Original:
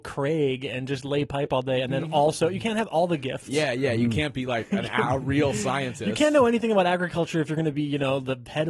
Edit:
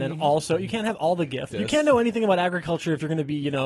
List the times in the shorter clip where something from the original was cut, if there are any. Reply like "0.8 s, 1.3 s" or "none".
1.5 s